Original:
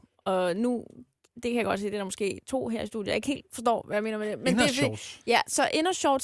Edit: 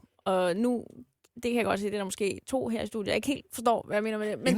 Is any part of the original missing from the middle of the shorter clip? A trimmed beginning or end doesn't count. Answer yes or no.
no